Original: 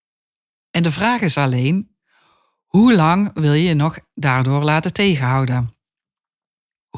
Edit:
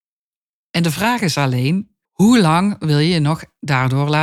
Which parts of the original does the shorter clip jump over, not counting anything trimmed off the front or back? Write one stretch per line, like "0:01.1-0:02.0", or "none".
0:02.0-0:02.6